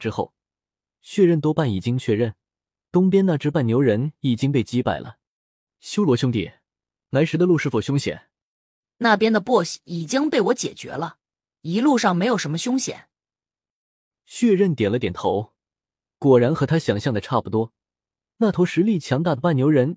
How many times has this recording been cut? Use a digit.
0